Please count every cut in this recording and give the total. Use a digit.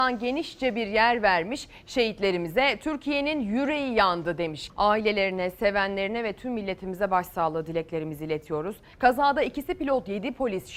2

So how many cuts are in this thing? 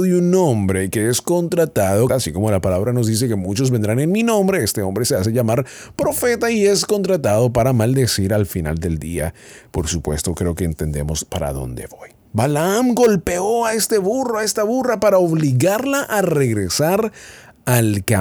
1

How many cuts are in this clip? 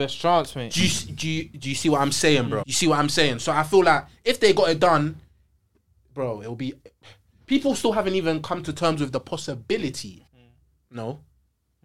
2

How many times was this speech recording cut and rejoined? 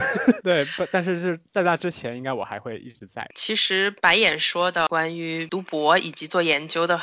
0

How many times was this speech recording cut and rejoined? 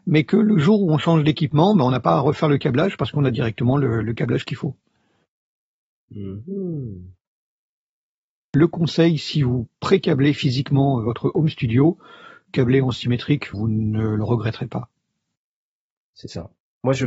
2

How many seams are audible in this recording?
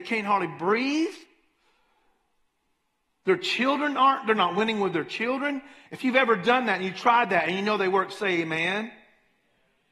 1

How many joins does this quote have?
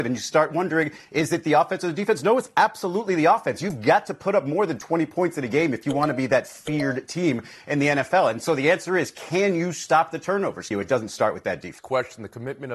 2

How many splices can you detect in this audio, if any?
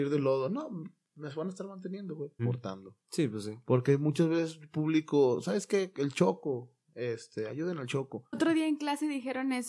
2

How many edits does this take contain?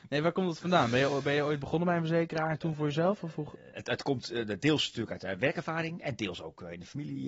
0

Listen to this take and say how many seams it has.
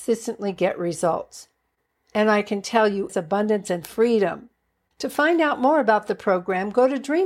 2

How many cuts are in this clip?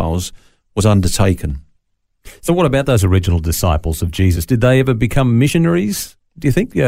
0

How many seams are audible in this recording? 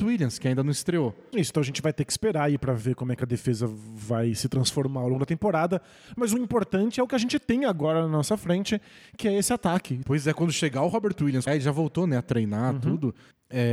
3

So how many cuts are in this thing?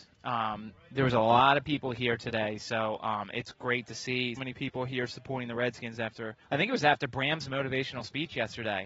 2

